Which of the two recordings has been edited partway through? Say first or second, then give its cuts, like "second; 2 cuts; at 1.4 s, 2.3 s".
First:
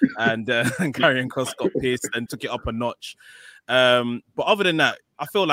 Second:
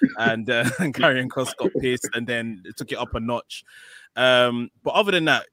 first; 1 cut; at 2.3 s